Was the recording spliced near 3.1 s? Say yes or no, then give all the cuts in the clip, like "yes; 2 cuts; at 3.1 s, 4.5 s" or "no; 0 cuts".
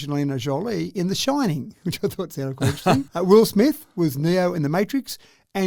yes; 1 cut; at 3.1 s